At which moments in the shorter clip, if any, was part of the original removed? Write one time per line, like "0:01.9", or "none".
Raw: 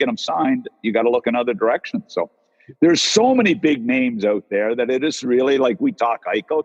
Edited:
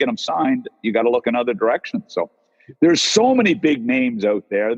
none

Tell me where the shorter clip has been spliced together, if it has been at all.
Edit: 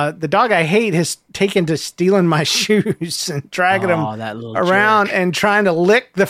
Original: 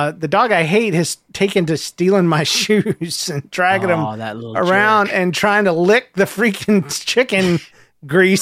none

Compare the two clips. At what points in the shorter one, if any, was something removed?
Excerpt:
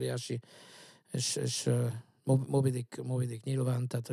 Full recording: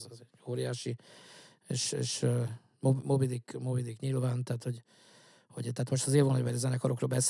none

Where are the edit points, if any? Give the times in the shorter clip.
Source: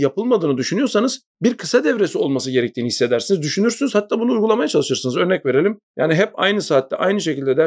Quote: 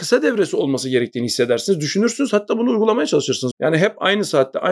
0:03.5

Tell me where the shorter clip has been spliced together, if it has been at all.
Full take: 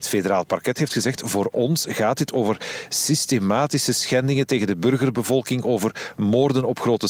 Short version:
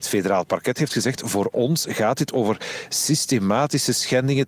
none

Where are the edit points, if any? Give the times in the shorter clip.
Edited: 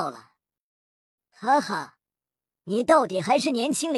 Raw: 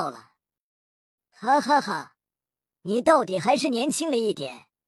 0:01.6

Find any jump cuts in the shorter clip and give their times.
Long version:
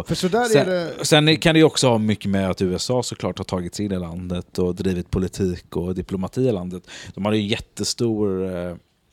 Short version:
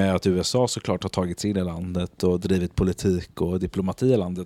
none

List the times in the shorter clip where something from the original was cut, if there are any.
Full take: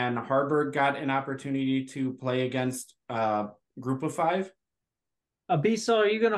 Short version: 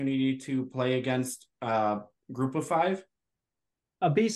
none

